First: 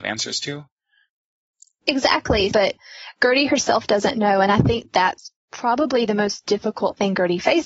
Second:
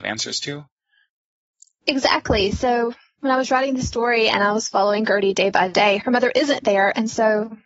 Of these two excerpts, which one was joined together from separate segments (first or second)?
first